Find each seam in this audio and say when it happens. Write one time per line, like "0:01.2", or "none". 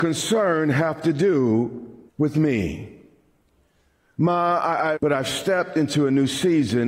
0:02.1
0:04.9